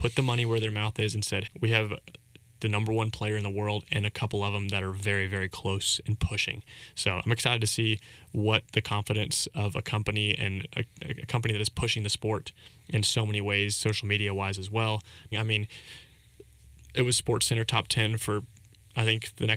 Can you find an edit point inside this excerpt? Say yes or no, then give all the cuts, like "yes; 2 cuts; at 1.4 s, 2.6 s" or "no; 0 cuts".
yes; 2 cuts; at 1.5 s, 15.3 s